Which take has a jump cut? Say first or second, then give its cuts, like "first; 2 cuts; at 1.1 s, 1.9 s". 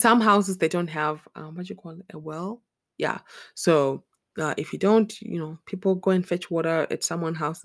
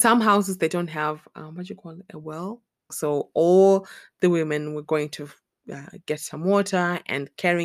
second; 1 cut; at 2.9 s